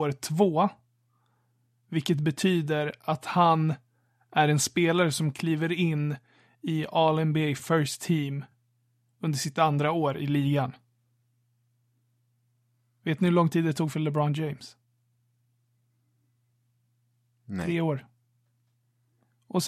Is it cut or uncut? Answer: uncut